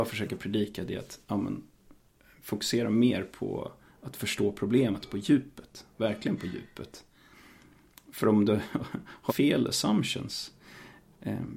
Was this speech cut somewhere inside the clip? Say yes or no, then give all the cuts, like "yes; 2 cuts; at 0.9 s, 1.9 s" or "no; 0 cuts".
yes; 1 cut; at 9.3 s